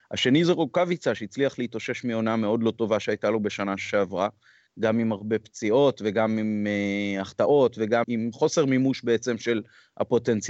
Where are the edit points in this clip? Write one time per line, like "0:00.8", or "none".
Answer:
0:08.0

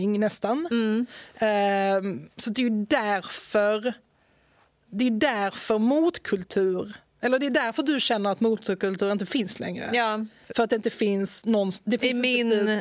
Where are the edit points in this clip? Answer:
0:02.3

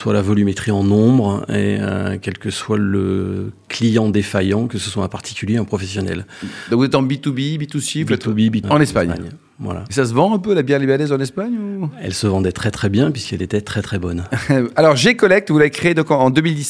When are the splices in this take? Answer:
0:08.6

